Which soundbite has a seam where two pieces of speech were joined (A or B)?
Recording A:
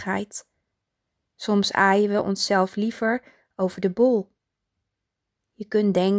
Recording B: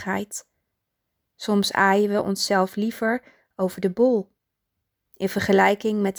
B